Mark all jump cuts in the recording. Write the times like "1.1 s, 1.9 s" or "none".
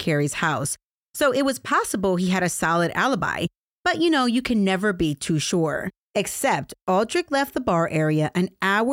6.1 s